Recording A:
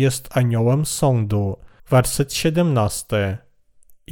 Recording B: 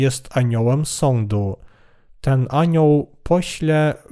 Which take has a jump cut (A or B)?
A